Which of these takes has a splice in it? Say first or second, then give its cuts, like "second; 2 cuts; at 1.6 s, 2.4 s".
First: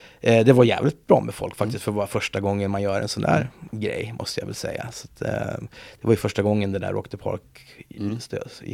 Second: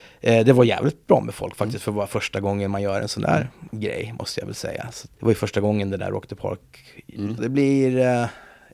second; 2 cuts; at 5.1 s, 7.4 s